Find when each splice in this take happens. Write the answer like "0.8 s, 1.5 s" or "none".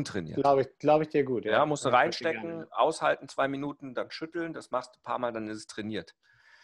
none